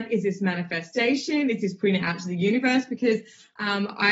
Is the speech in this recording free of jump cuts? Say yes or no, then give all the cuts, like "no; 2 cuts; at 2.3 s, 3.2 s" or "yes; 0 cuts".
yes; 0 cuts